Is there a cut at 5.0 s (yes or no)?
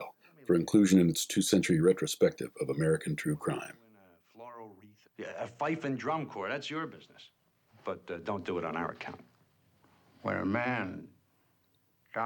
yes